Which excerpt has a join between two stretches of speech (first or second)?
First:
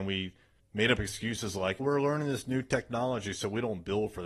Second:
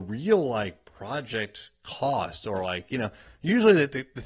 first